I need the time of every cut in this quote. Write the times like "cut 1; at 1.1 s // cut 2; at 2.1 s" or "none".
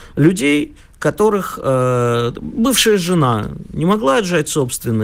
none